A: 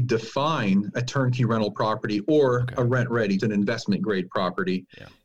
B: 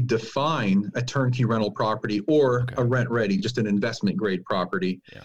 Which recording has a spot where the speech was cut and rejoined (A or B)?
A